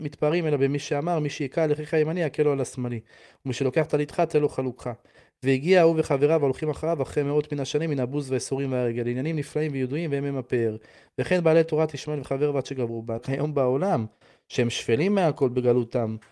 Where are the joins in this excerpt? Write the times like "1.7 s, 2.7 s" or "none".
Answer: 13.2 s

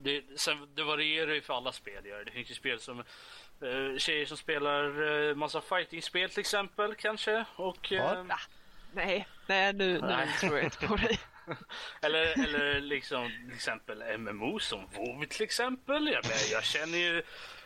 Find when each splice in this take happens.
none

